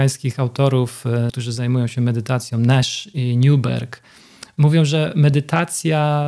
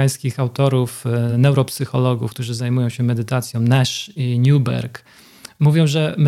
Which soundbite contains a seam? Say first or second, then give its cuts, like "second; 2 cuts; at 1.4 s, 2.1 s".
first; 1 cut; at 1.3 s